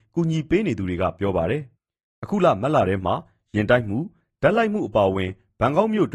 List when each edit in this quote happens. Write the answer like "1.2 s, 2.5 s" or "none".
1.7 s